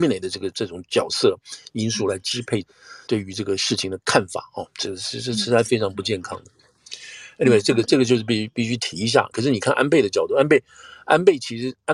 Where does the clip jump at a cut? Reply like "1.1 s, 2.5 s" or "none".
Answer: 9.3 s